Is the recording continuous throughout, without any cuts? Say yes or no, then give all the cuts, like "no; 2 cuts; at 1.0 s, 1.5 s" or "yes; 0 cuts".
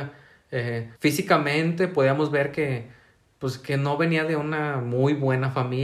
no; 1 cut; at 1.0 s